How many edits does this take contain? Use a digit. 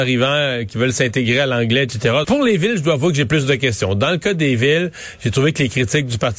1